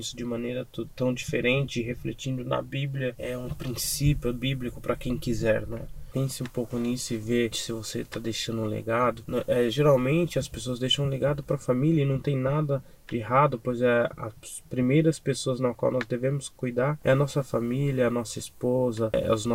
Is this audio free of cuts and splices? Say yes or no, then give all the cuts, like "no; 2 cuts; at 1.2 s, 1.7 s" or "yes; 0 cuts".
no; 1 cut; at 7.5 s